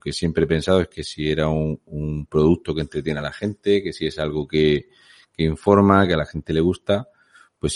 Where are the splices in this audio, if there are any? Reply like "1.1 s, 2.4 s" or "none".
none